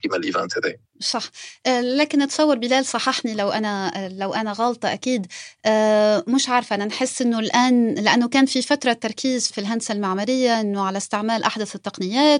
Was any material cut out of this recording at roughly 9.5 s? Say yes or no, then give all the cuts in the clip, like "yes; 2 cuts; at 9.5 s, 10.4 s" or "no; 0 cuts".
yes; 1 cut; at 9.5 s